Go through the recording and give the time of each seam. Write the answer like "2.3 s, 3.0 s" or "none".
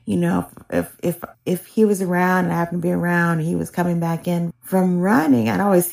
1.3 s, 4.5 s